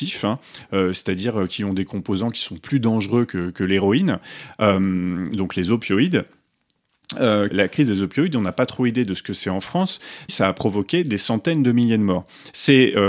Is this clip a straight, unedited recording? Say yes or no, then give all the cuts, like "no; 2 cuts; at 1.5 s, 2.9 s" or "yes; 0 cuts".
no; 2 cuts; at 7.5 s, 10.3 s